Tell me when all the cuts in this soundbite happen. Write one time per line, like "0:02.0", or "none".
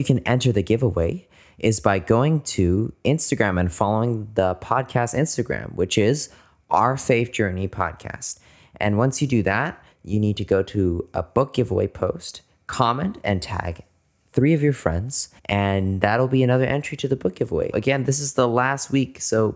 0:09.9
0:15.4
0:17.7